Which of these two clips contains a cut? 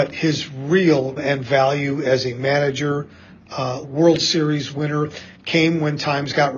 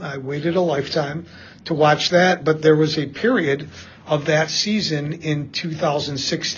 first; 2 cuts; at 1.2 s, 3.8 s

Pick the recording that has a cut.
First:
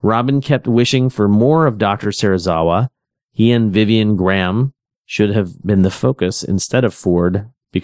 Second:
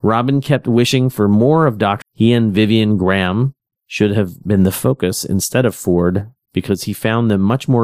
second; 1 cut; at 2.0 s

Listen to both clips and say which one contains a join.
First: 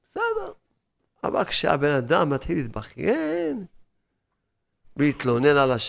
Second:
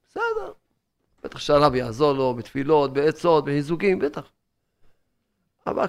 first; 1 cut; at 1.1 s

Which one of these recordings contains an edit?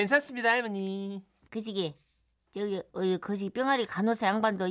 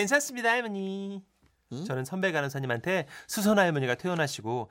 first; 2 cuts; at 1.5 s, 2.9 s

